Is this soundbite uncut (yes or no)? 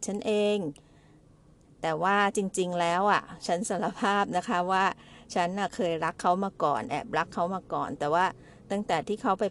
yes